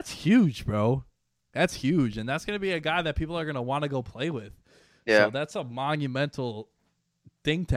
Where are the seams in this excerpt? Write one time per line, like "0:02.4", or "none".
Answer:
none